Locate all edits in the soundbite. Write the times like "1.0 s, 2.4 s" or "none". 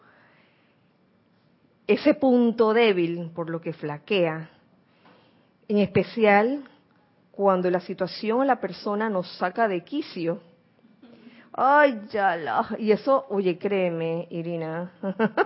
none